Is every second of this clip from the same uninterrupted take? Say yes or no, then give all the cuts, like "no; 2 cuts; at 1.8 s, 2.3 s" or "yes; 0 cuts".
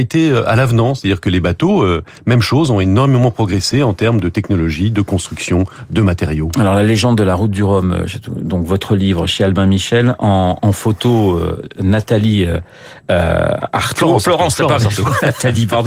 no; 1 cut; at 10.6 s